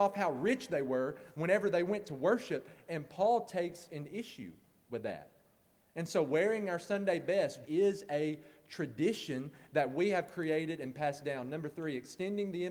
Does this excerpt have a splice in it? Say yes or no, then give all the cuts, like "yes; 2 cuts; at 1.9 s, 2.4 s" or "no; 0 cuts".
yes; 1 cut; at 7.7 s